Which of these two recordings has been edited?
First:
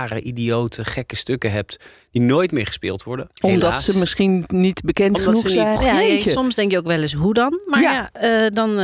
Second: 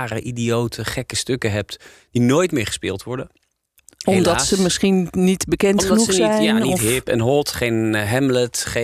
first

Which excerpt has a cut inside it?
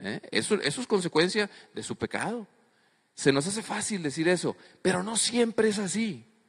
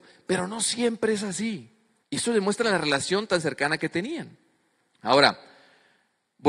second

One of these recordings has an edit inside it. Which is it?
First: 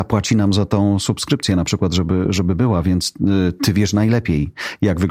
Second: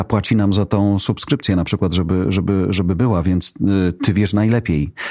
first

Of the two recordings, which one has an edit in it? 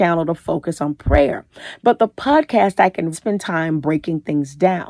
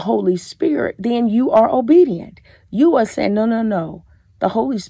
first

